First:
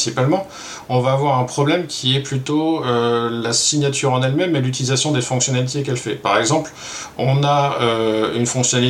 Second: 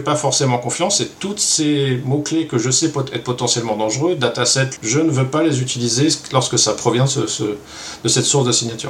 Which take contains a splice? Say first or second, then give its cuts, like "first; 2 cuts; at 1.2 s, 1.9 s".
second; 1 cut; at 4.8 s